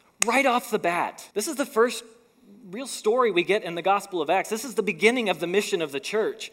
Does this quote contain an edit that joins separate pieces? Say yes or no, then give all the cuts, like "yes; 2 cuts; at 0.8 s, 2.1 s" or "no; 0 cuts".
yes; 1 cut; at 1.3 s